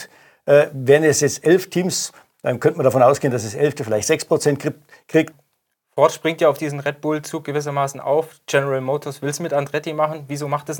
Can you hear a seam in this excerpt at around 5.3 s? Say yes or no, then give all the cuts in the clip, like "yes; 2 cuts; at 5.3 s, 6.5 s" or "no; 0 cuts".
yes; 1 cut; at 5.3 s